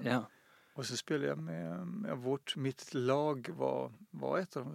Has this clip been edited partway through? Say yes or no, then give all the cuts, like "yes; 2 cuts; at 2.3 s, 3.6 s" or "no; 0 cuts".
no; 0 cuts